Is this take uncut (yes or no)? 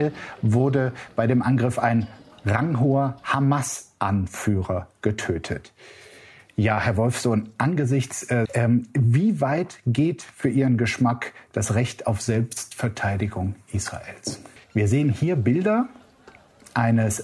no